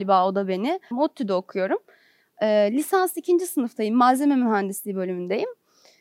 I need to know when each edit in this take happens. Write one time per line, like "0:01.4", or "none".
0:00.9